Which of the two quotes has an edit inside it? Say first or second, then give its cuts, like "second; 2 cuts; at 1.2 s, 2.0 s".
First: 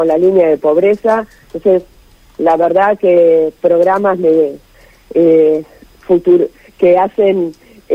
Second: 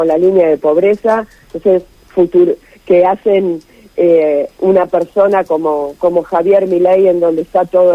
second; 1 cut; at 2.0 s